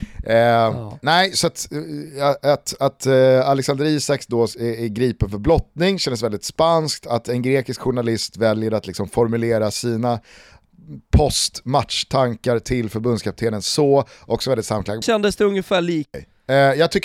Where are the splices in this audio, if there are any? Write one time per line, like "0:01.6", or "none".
0:15.0
0:16.1